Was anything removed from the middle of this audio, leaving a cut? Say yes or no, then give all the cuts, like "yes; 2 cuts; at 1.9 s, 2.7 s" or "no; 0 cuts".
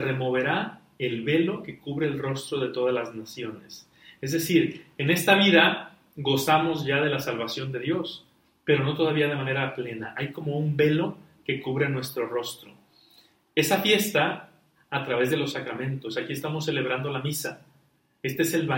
yes; 1 cut; at 14.7 s